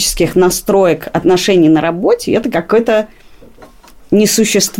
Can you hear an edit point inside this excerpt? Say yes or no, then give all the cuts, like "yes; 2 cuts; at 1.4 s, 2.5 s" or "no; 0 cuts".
no; 0 cuts